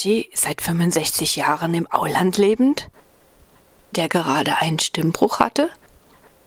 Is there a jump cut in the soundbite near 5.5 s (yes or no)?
no